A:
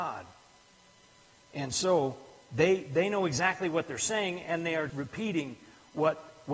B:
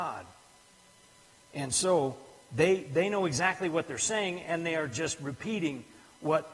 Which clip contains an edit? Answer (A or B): A